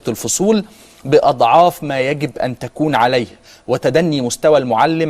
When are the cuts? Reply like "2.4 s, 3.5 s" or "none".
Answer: none